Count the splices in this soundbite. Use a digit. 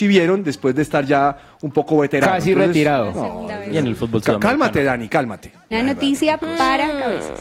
1